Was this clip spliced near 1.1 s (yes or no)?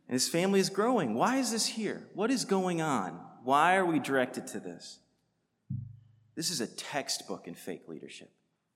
no